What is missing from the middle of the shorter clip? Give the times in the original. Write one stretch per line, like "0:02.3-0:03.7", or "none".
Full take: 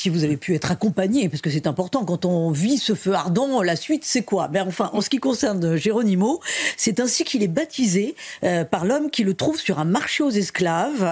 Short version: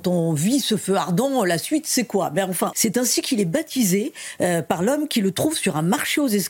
0:04.9-0:06.8